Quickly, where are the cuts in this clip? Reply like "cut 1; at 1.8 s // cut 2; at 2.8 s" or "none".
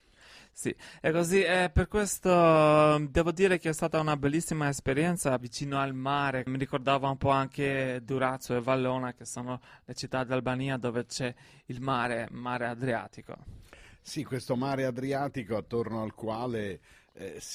cut 1; at 5.4 s // cut 2; at 6.5 s

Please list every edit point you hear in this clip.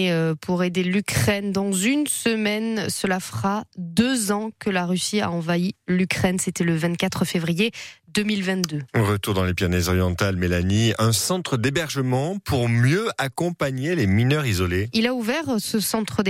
none

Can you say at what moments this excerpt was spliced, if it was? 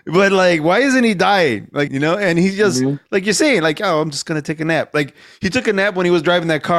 cut 1; at 1.9 s

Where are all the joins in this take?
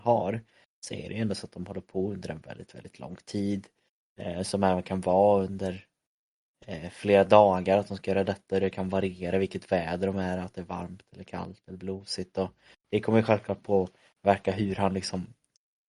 none

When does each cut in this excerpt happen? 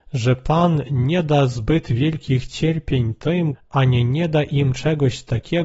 cut 1; at 3.5 s

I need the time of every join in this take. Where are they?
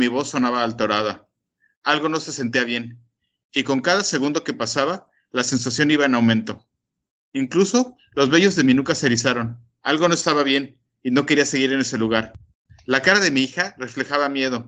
none

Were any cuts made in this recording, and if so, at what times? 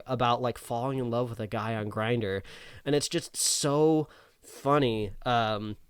none

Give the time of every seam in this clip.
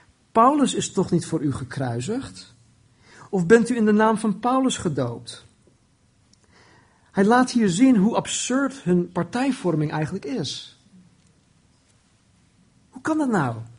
none

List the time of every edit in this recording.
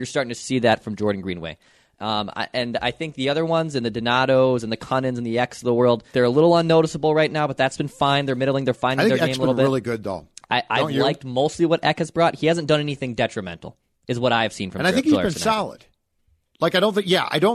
cut 1; at 6.1 s

